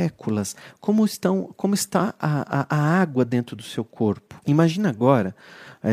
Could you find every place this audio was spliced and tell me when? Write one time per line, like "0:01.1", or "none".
0:04.4